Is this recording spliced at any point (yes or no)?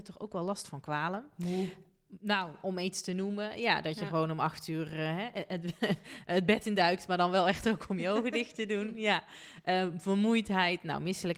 no